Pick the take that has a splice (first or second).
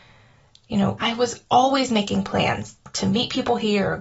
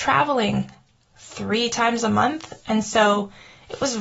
first